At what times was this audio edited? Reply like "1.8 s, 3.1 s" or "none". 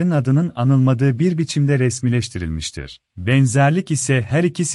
3.1 s